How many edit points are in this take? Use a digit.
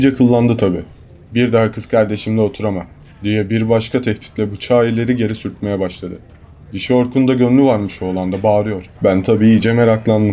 2